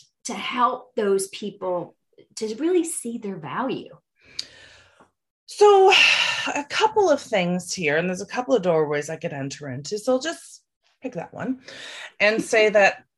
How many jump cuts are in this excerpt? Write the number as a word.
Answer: zero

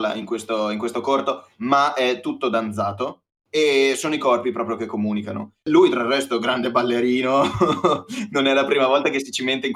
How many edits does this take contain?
zero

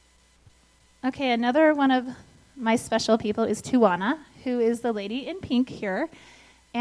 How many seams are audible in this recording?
zero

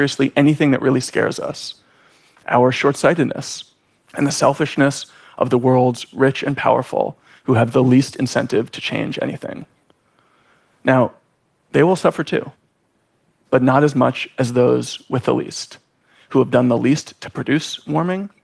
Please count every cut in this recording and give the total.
one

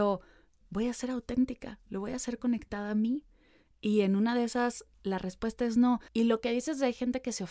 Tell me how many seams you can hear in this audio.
two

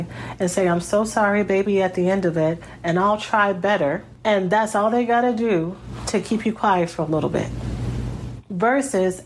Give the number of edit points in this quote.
zero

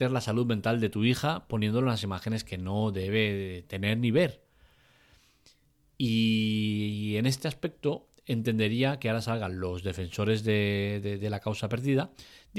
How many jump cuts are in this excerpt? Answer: zero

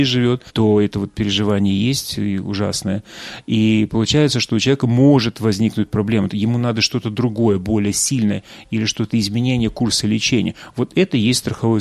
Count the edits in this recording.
one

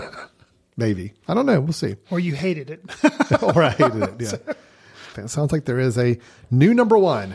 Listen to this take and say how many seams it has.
one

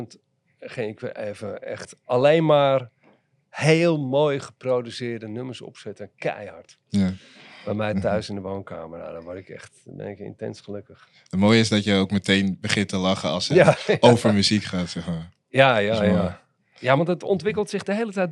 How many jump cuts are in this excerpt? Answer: one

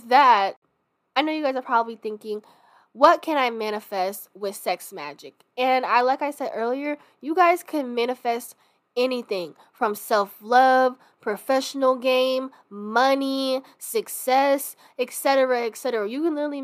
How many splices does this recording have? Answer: zero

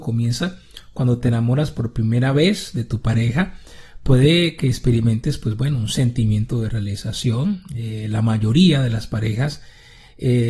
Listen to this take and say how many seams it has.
zero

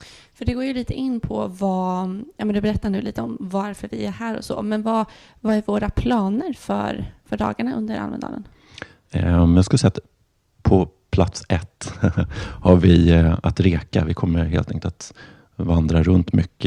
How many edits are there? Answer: zero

